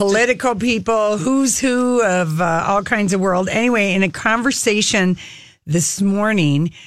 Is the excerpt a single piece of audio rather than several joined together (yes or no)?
yes